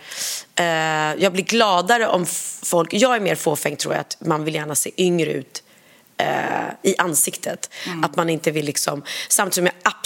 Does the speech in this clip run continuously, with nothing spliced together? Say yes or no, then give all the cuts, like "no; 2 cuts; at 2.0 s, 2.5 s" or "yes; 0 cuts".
yes; 0 cuts